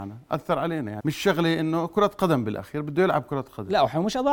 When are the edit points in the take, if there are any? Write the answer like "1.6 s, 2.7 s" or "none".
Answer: 1.0 s